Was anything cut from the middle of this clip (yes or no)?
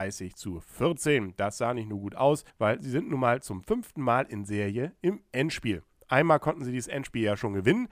yes